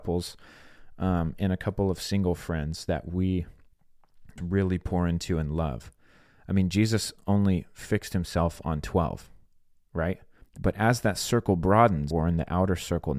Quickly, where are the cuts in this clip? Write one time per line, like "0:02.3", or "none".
0:04.4
0:10.4
0:12.1